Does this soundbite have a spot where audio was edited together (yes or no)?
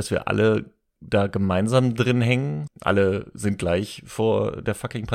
yes